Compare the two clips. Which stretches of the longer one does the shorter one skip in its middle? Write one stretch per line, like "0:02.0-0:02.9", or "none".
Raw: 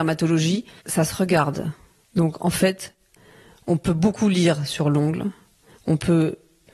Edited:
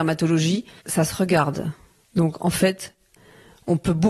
none